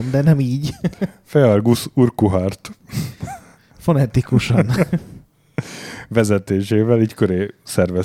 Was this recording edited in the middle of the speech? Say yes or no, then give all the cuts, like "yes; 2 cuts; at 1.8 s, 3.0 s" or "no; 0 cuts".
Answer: no; 0 cuts